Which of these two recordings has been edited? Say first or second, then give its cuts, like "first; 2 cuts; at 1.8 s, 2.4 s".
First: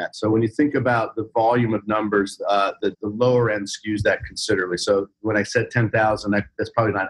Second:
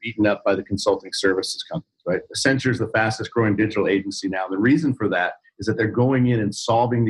first; 1 cut; at 2.9 s